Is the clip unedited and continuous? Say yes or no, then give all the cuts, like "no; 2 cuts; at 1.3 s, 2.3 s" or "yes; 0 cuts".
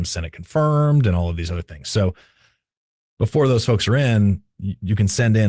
yes; 0 cuts